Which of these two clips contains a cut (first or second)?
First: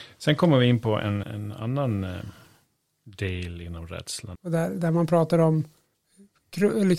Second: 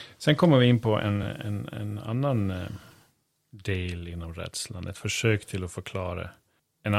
first